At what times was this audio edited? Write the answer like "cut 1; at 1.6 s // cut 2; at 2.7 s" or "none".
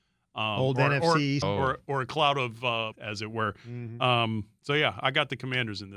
cut 1; at 1.4 s // cut 2; at 2.9 s